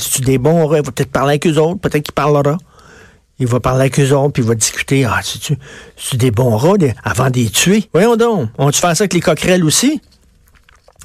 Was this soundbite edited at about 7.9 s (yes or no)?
yes